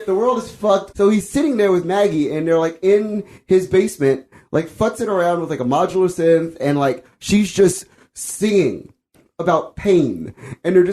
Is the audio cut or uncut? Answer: cut